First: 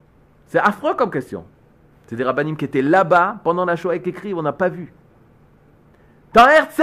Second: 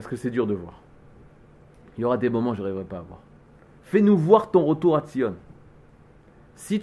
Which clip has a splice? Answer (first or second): first